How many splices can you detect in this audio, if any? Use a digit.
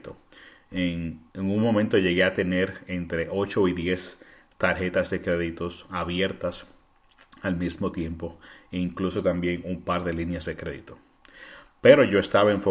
1